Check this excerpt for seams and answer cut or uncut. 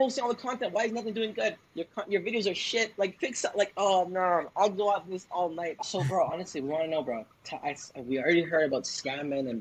cut